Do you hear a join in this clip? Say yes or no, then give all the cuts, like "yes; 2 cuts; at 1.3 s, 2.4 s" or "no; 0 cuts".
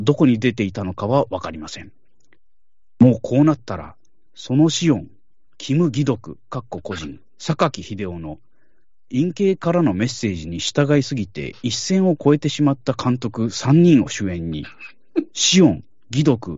no; 0 cuts